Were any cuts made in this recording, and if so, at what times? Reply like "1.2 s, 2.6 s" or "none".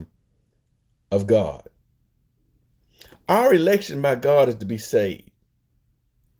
none